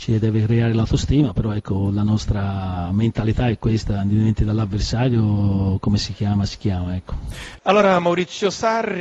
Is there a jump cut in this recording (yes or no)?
no